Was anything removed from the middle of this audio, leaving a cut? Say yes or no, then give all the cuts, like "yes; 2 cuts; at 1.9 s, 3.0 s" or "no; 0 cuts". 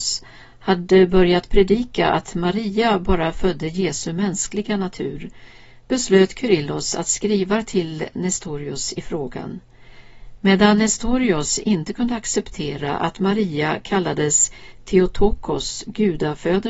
yes; 1 cut; at 10.4 s